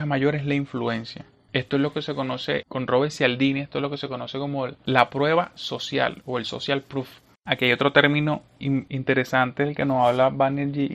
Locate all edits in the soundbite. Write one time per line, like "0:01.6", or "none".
0:08.9